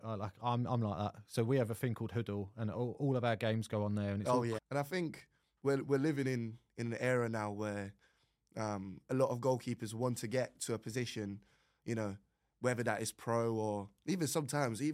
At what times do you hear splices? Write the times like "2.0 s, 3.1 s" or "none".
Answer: 4.6 s

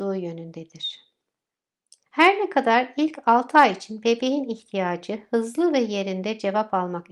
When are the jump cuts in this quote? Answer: 2.1 s

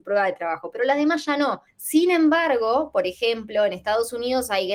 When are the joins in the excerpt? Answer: 1.7 s

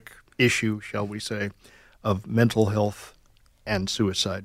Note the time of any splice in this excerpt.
none

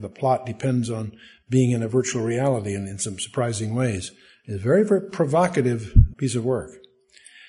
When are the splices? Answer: 6.1 s

